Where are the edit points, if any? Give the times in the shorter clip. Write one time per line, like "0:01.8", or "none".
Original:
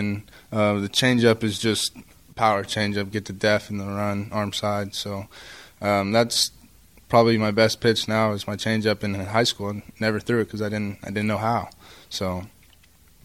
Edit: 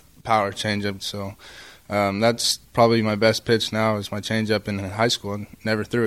0:01.0
0:02.6